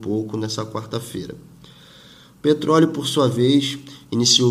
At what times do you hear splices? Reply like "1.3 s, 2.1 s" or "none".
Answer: none